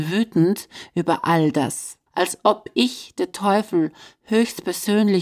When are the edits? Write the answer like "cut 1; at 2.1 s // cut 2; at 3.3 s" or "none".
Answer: cut 1; at 2.1 s